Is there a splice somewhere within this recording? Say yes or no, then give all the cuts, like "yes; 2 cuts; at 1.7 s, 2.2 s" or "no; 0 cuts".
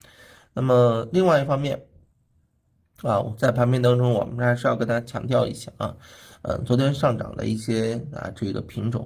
no; 0 cuts